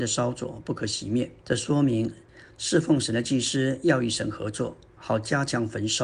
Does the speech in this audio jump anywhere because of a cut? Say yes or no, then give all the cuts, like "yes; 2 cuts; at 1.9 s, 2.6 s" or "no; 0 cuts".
yes; 2 cuts; at 1.4 s, 4.9 s